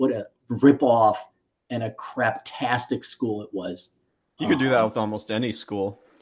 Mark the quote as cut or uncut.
uncut